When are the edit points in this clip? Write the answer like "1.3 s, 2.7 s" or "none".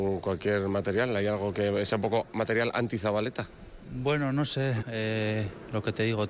4.8 s